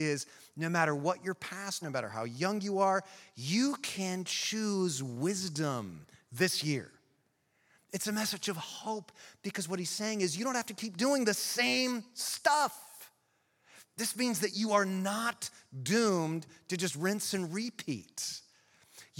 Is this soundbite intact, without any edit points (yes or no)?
no